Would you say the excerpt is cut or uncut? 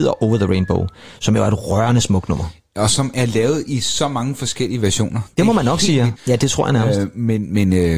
cut